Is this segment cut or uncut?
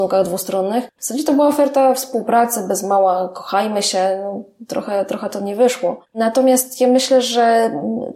uncut